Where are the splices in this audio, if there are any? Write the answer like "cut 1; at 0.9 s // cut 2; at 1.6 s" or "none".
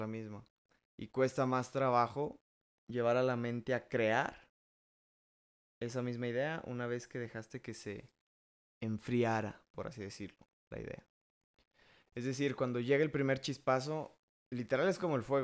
none